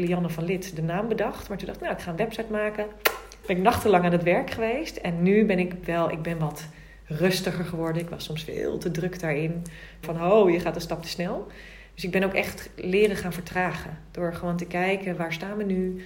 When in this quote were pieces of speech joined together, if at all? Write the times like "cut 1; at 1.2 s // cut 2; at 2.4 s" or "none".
cut 1; at 3.4 s // cut 2; at 10.0 s